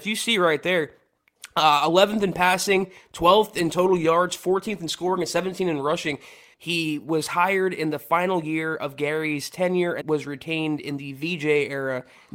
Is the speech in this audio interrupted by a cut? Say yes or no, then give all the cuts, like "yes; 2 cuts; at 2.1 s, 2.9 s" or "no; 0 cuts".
yes; 2 cuts; at 6.5 s, 10.0 s